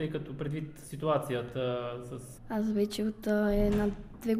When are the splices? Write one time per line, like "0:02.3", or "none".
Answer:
0:02.4